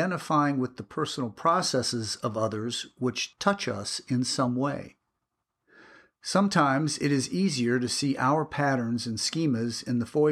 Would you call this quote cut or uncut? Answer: uncut